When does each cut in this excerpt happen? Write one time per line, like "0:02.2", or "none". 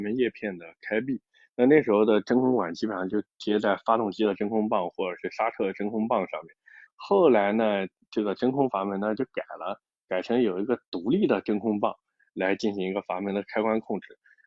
0:06.9